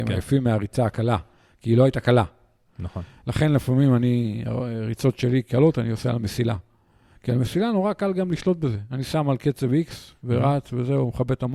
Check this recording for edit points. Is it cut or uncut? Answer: uncut